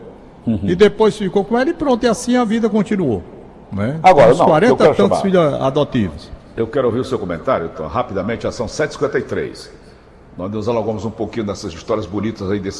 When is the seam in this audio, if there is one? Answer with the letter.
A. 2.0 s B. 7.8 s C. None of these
C